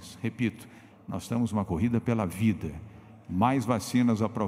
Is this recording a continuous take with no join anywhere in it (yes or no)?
no